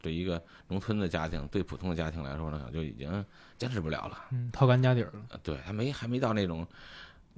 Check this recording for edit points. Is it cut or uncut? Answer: uncut